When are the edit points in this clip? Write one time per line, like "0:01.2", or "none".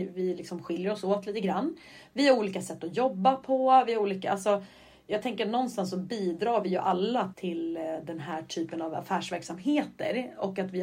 0:07.3